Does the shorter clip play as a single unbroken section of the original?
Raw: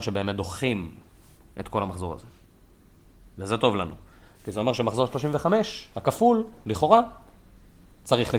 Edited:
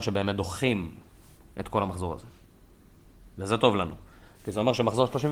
yes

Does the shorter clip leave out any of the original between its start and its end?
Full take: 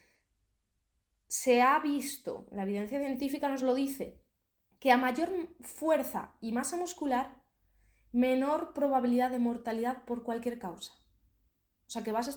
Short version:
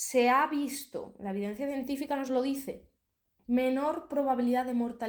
yes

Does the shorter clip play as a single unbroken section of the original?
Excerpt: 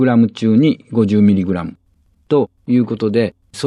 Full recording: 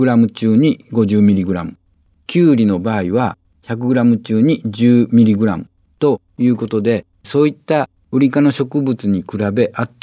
no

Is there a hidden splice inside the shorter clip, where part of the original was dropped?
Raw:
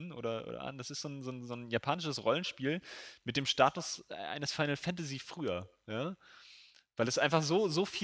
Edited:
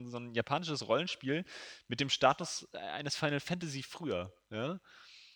no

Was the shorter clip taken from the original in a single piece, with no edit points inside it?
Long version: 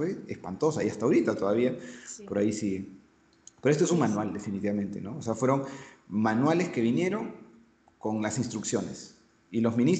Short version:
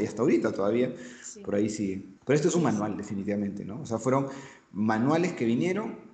no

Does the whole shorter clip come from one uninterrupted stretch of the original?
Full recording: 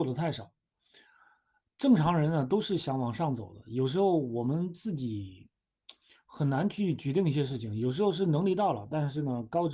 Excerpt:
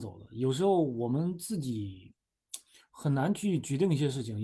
yes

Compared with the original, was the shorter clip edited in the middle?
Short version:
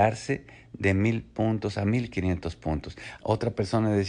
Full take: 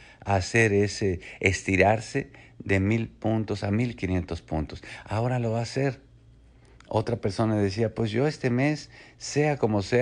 yes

